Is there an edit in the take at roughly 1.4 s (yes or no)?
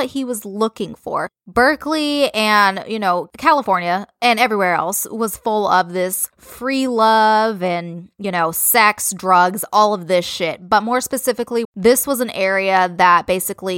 no